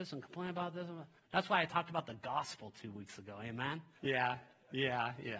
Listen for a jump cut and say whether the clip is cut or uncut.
cut